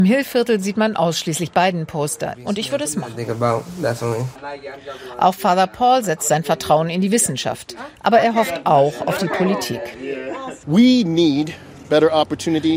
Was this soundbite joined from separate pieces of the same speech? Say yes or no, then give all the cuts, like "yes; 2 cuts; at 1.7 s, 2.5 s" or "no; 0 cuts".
yes; 1 cut; at 2.3 s